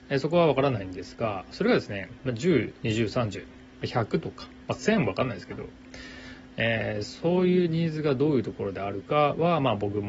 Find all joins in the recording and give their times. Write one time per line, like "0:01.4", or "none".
0:02.8